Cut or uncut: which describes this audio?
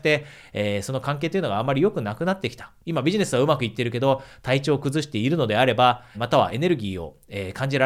cut